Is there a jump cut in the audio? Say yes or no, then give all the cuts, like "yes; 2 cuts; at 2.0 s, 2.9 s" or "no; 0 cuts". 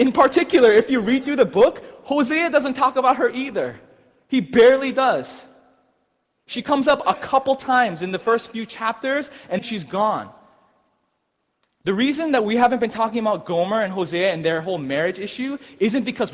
yes; 1 cut; at 9.6 s